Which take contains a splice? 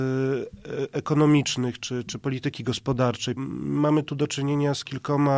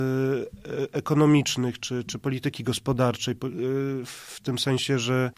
first; 1 cut; at 3.4 s

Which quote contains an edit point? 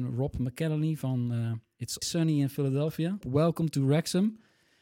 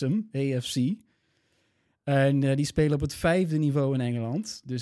first; 2 cuts; at 2.0 s, 3.2 s

